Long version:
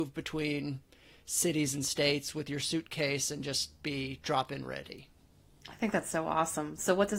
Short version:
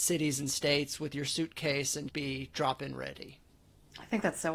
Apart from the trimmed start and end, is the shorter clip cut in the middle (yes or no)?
yes